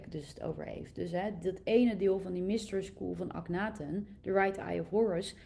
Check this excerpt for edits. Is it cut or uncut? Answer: uncut